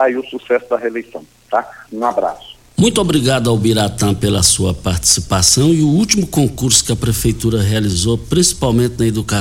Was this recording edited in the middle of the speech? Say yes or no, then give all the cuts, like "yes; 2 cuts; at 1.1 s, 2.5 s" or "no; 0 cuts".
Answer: yes; 1 cut; at 1.9 s